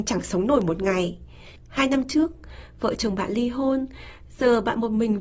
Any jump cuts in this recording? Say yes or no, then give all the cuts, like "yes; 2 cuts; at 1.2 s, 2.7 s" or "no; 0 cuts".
yes; 1 cut; at 1.6 s